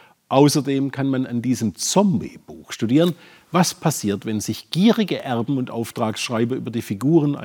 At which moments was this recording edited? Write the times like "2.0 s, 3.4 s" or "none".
none

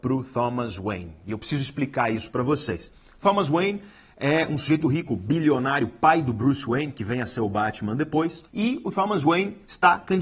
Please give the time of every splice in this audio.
4.8 s, 8.5 s

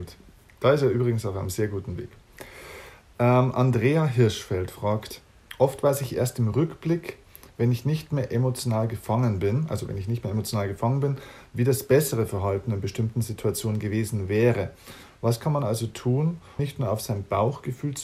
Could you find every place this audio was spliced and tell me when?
15.1 s, 16.6 s

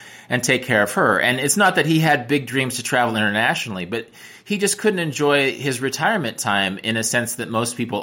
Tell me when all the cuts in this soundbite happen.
none

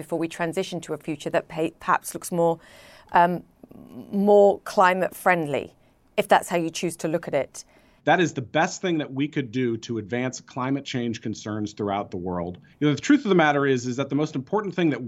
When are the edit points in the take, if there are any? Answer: 8.0 s, 12.7 s

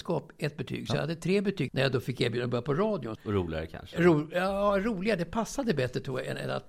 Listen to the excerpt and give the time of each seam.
1.7 s, 3.2 s

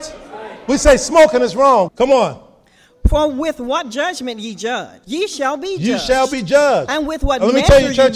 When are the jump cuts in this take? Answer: 1.9 s, 5.0 s

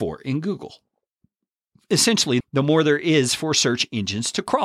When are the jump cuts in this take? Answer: 2.4 s

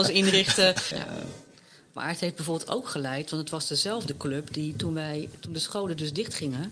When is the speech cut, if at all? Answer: 0.9 s

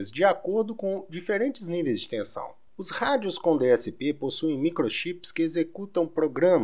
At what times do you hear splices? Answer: 2.7 s

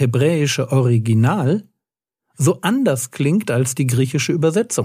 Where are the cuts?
none

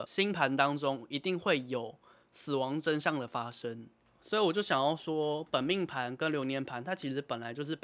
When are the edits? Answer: 4.0 s

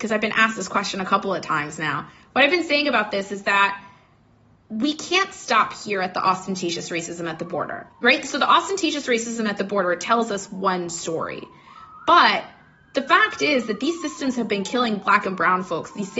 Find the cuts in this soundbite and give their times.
none

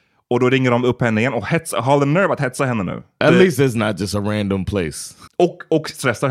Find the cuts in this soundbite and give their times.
3.2 s, 5.3 s

